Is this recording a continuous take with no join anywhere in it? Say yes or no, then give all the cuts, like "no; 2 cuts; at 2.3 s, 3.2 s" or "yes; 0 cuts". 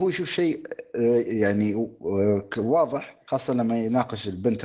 yes; 0 cuts